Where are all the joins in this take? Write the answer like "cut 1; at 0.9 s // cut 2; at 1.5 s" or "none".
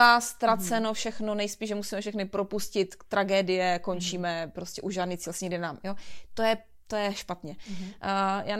none